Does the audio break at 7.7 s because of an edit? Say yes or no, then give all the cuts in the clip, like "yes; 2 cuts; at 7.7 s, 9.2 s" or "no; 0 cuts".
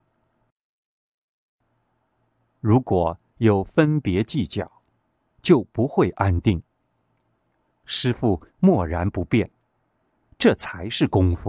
yes; 1 cut; at 7.7 s